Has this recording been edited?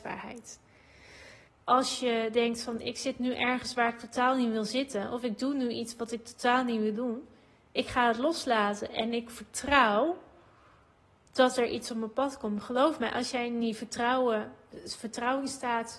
yes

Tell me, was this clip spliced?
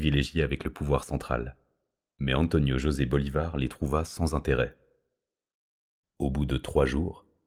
yes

